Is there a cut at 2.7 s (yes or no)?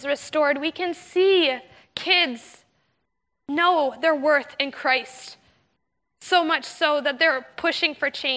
no